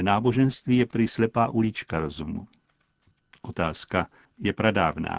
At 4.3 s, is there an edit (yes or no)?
yes